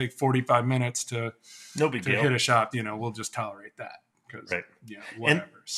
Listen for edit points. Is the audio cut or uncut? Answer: cut